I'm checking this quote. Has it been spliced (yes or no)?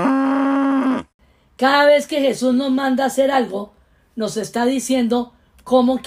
no